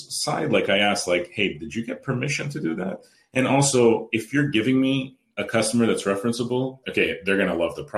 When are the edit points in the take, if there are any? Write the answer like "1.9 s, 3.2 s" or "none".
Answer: 4.1 s, 6.8 s